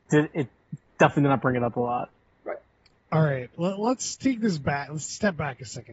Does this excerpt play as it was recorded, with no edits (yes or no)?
yes